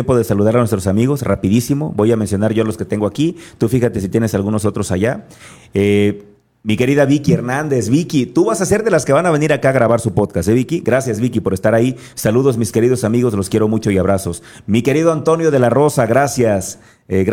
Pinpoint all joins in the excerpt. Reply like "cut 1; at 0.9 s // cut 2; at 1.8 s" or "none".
none